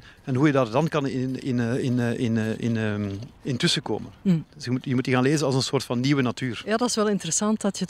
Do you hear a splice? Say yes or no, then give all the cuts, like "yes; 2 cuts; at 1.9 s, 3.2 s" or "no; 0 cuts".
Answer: yes; 1 cut; at 4.4 s